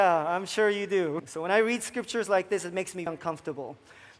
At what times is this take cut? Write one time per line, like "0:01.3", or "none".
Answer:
0:01.2
0:03.1